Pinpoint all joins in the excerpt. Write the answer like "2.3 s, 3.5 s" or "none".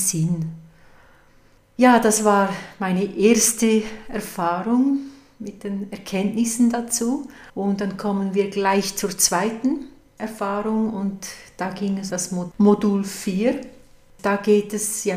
7.5 s, 12.1 s